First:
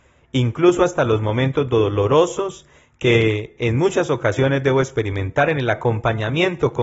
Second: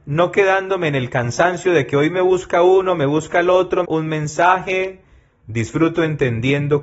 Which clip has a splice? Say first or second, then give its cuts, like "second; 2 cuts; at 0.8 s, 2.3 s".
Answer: second; 1 cut; at 3.9 s